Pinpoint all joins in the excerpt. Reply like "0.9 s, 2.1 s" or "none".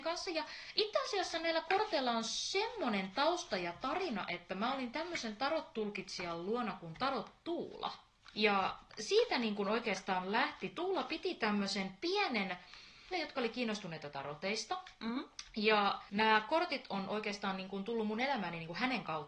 8.3 s, 13.1 s